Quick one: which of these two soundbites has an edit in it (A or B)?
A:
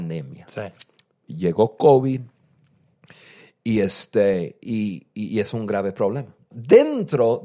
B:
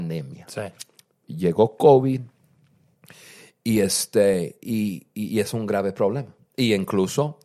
A